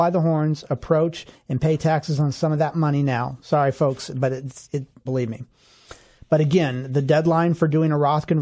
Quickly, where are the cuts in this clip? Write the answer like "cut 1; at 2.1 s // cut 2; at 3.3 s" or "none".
cut 1; at 5.1 s